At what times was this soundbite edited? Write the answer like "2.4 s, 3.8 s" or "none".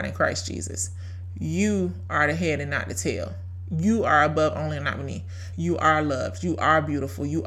5.5 s